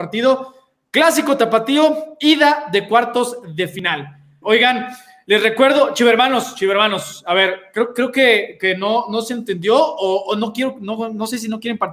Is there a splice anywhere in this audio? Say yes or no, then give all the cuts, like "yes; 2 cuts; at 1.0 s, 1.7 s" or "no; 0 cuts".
yes; 1 cut; at 4.4 s